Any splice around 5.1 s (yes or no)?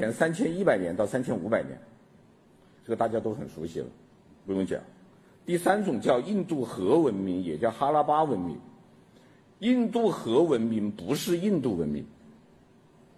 no